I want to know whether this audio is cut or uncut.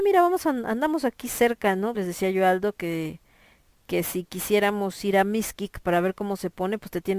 cut